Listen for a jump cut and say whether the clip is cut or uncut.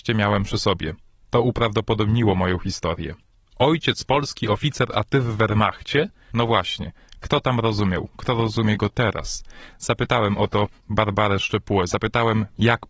cut